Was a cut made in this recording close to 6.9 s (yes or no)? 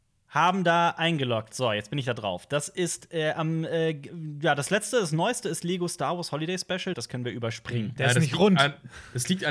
yes